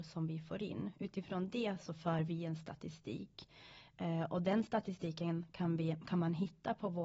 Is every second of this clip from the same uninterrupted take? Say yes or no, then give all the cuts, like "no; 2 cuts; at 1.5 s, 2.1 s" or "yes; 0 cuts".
yes; 0 cuts